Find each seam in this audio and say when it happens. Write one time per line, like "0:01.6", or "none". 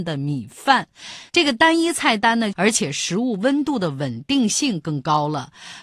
0:02.5

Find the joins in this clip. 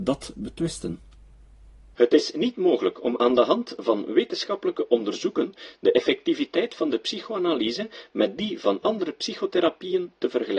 0:01.9

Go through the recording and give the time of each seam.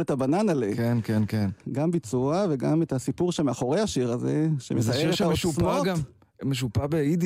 0:01.6

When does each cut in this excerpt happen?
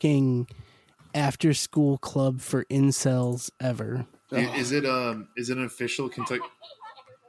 0:04.3

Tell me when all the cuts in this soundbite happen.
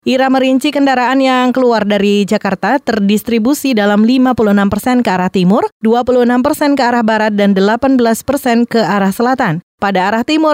none

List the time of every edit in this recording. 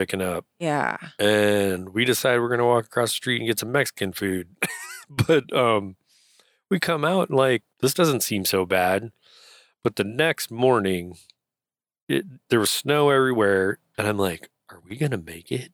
0:07.7
0:13.9

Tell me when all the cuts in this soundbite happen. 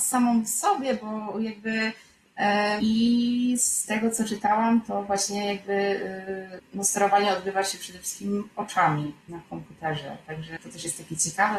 0:02.8

